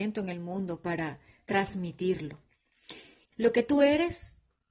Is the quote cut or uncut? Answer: cut